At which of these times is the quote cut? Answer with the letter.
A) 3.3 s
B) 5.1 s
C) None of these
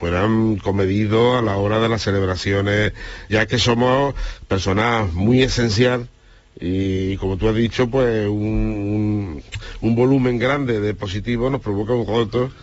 A